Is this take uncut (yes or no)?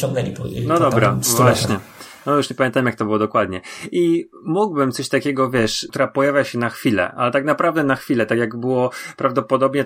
no